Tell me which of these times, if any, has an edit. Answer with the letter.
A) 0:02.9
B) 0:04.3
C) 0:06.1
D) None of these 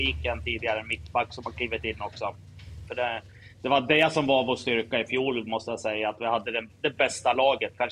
A